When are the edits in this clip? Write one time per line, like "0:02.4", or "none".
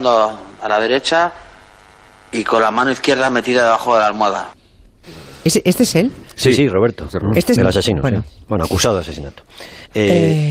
0:07.6